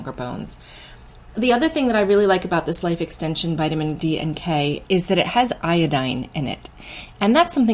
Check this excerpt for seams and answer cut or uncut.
cut